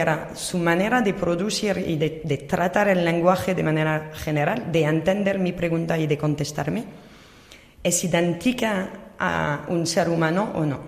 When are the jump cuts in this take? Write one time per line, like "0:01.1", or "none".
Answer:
none